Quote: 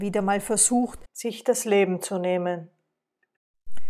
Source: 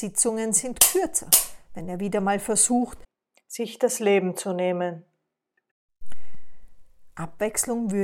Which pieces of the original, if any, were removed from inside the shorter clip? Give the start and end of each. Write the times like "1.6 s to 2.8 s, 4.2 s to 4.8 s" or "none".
3.1 s to 3.4 s